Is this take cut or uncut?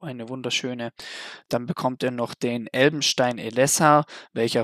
uncut